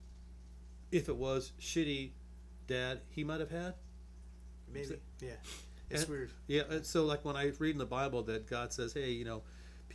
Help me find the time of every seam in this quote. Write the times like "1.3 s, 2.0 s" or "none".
5.1 s